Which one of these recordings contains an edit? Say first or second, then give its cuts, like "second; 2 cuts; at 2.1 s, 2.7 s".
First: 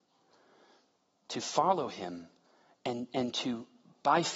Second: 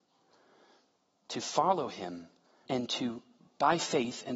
second; 1 cut; at 2.7 s